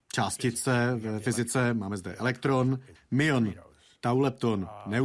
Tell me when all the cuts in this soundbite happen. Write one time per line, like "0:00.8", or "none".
0:03.0